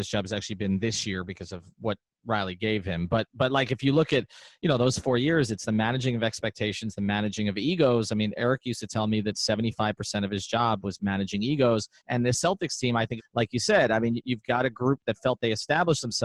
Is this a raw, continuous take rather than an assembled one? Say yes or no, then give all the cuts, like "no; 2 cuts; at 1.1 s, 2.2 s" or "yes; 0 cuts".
no; 2 cuts; at 12.0 s, 13.2 s